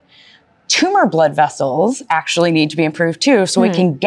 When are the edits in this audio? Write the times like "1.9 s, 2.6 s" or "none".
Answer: none